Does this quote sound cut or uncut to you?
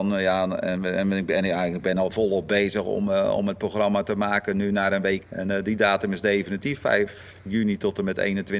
cut